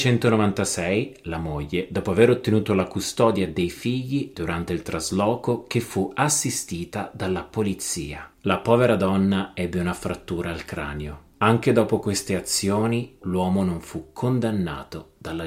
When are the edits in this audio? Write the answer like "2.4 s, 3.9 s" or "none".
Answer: 4.3 s, 8.3 s, 13.2 s

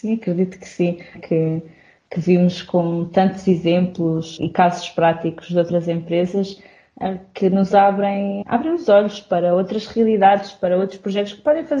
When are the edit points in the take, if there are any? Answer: 1.1 s, 4.4 s, 8.4 s

